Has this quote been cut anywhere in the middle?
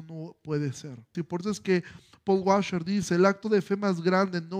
yes; 1 cut; at 1.1 s

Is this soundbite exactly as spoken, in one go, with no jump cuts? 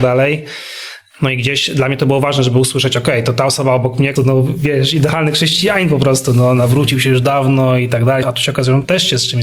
no; 2 cuts; at 4.2 s, 8.2 s

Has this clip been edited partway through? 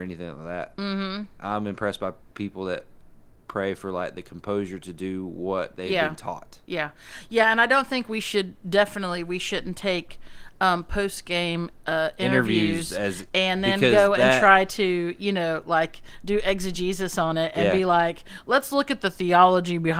no; 0 cuts

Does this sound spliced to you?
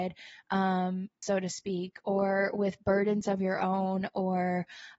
yes; 1 cut; at 1.2 s

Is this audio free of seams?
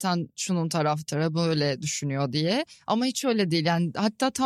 yes; 0 cuts

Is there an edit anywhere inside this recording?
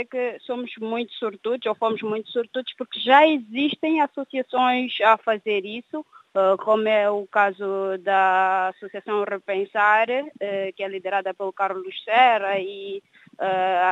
no; 0 cuts

